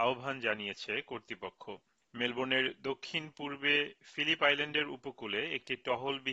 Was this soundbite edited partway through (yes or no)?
no